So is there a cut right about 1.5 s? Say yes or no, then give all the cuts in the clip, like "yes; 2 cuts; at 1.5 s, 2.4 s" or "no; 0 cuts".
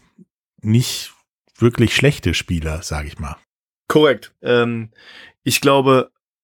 no; 1 cut; at 4.4 s